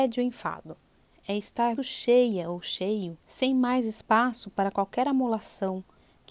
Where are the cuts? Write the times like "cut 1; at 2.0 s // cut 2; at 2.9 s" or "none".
cut 1; at 1.8 s // cut 2; at 3.2 s